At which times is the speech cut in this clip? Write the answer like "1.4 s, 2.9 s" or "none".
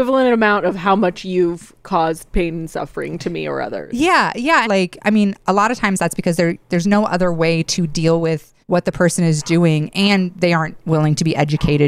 4.7 s, 8.6 s